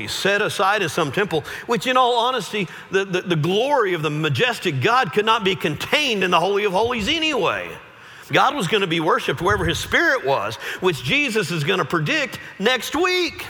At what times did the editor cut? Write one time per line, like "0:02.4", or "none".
0:08.3

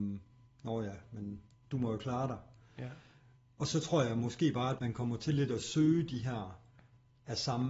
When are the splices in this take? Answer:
0:04.8

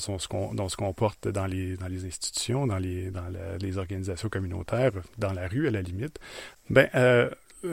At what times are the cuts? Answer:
0:06.5

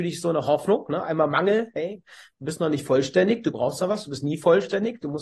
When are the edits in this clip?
none

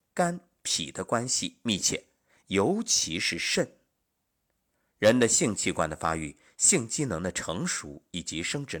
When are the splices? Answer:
none

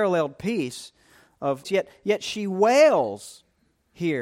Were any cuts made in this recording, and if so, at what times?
0:01.6

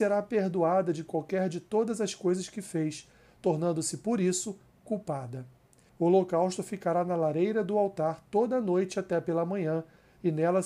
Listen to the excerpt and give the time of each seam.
0:05.9

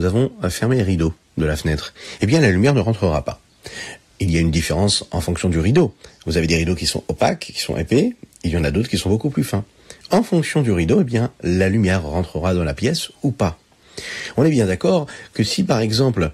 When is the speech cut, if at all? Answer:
none

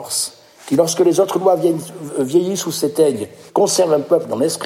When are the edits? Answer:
0:03.5

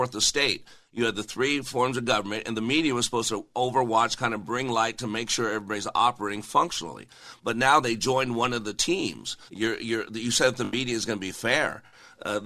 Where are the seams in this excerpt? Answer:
0:09.5

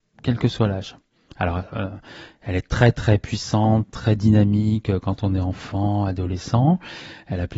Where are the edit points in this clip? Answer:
none

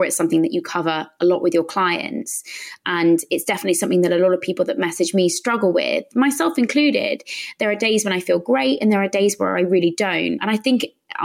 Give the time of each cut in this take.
none

